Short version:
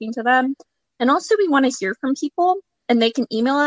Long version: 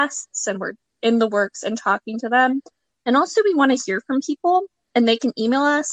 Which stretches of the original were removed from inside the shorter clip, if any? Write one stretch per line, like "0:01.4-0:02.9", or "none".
none